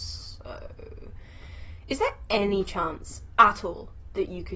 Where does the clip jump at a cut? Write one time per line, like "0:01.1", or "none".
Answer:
none